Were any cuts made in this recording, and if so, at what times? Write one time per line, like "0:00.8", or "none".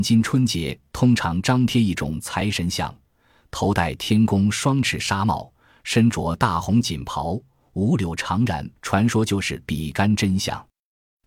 0:08.8